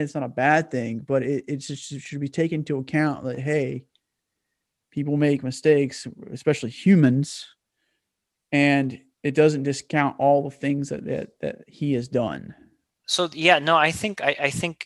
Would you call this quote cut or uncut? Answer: cut